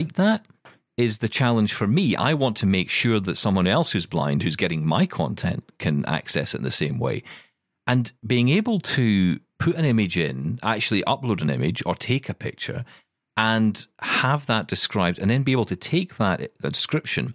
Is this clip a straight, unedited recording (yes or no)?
yes